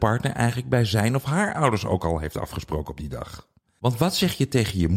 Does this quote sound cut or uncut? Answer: cut